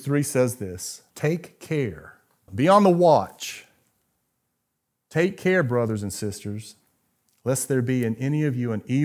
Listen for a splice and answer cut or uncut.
cut